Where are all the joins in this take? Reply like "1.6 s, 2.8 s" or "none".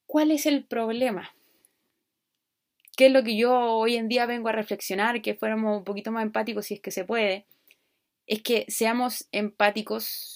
none